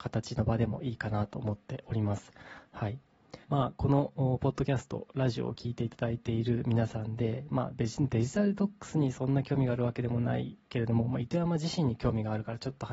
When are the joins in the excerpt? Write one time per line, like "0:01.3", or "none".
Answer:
0:03.4